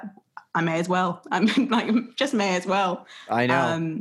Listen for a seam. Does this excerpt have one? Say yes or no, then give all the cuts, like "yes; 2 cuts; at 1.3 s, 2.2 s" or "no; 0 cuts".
no; 0 cuts